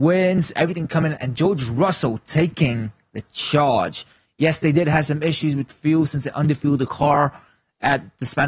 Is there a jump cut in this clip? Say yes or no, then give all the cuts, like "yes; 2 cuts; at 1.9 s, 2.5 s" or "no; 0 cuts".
no; 0 cuts